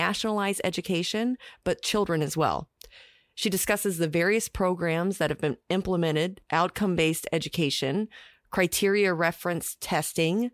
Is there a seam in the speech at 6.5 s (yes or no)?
yes